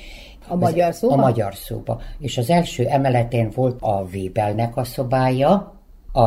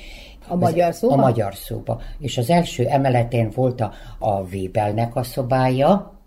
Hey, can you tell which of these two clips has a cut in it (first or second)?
first